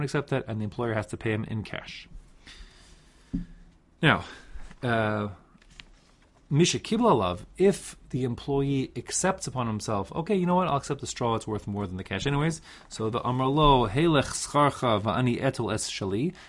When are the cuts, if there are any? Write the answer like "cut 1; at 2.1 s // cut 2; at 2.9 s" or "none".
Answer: cut 1; at 13.1 s